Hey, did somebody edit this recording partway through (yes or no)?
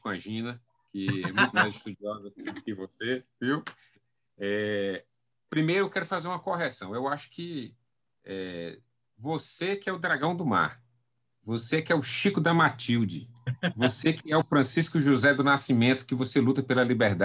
no